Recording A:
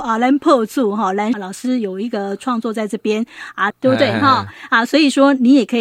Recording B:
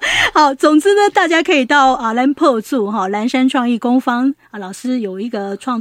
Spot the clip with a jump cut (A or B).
A